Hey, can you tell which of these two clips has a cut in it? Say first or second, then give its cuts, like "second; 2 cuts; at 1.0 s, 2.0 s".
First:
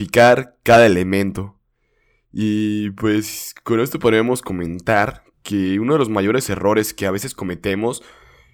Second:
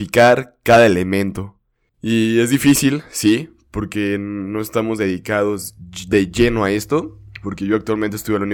second; 1 cut; at 1.9 s